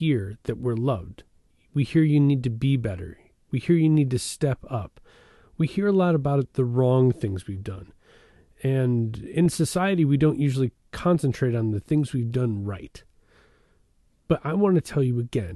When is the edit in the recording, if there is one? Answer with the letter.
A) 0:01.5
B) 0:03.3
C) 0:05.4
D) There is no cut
A